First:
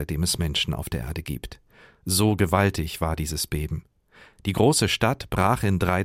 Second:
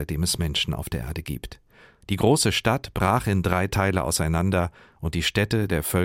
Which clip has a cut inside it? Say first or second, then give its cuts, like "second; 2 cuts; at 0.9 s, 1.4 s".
second; 1 cut; at 2.0 s